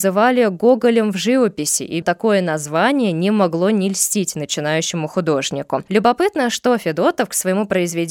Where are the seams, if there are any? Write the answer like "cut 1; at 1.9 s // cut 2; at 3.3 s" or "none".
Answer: cut 1; at 2.0 s // cut 2; at 5.9 s